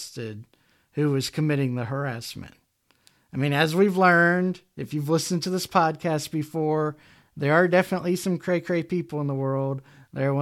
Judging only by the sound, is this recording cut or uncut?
uncut